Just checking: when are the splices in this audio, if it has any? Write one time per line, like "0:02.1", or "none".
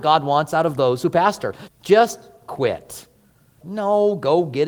0:01.7
0:03.6